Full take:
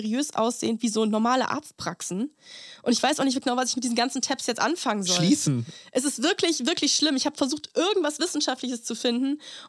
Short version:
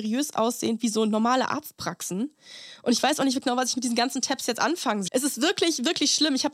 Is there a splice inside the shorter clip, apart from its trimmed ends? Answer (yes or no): yes